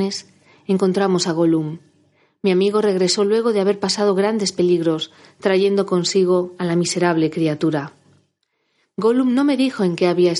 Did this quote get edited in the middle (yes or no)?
no